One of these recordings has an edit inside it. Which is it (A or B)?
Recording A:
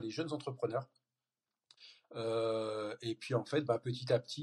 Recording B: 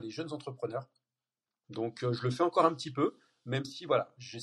B